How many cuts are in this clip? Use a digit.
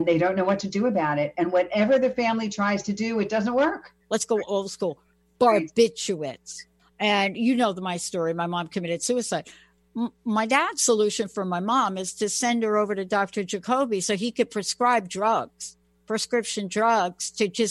2